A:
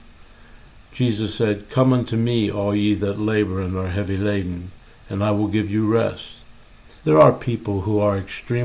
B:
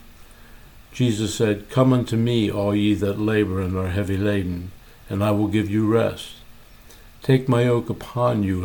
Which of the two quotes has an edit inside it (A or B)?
A